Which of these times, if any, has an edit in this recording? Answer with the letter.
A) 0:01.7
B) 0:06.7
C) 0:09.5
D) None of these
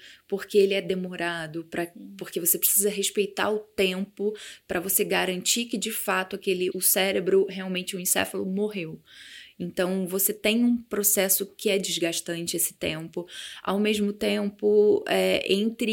B